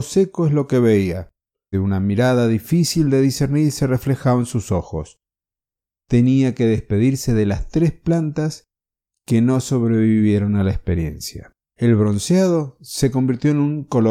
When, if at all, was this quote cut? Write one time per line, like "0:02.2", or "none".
0:01.7
0:11.7